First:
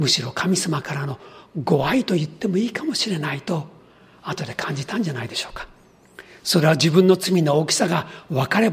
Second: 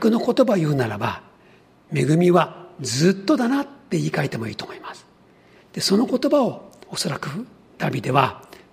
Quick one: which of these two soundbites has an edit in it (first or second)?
second